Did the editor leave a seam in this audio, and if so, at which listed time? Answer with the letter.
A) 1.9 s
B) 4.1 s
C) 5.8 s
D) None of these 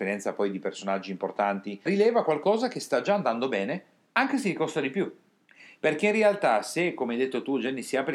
A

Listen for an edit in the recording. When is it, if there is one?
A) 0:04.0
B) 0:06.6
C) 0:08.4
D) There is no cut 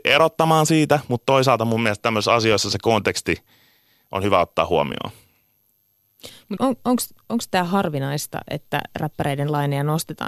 B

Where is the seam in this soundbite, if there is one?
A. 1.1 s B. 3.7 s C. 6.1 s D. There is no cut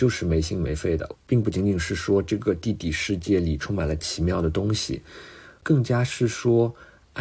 A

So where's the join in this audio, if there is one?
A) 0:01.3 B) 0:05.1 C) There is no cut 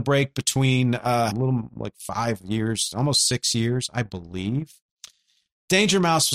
A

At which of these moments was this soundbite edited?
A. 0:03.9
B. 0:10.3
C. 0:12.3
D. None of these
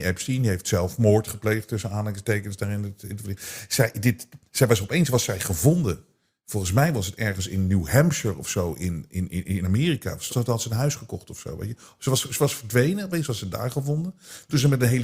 B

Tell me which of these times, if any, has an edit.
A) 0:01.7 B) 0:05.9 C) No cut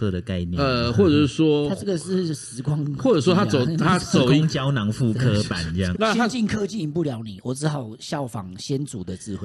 B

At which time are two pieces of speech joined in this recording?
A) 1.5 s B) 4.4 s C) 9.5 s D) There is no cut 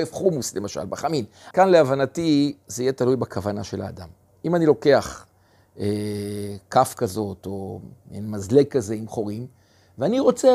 A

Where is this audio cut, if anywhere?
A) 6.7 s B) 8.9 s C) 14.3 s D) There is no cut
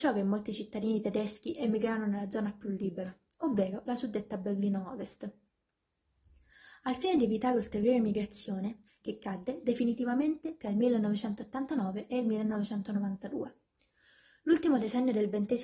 B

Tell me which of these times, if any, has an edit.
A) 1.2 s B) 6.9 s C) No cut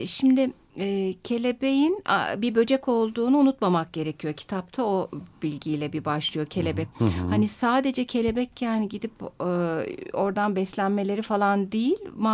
B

